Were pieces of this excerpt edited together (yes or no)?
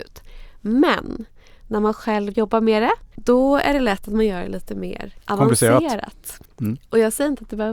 yes